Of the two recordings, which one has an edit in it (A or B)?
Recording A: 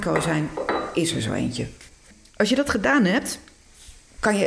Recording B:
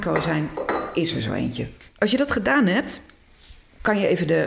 B